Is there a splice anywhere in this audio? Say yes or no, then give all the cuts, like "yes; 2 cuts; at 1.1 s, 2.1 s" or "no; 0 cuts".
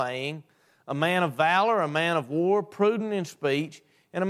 no; 0 cuts